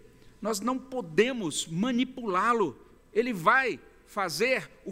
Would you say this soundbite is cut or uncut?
cut